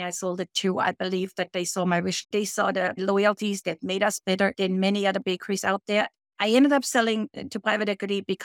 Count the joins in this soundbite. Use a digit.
3